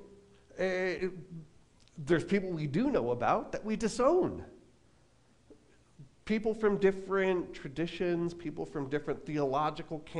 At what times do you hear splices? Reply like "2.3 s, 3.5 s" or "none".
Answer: none